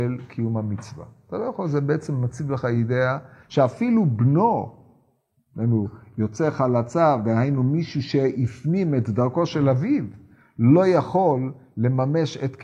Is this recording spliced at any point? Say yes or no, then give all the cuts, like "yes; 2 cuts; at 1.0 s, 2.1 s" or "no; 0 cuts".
no; 0 cuts